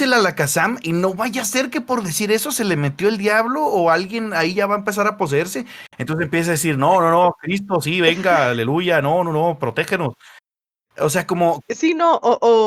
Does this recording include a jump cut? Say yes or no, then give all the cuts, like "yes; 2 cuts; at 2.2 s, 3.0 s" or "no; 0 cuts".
yes; 1 cut; at 11.6 s